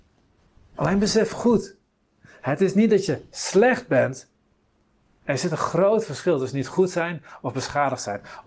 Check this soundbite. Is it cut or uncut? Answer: cut